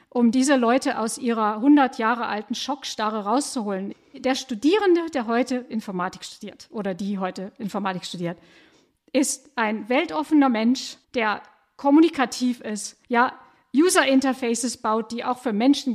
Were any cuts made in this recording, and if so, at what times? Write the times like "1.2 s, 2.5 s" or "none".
3.9 s, 11.0 s, 13.0 s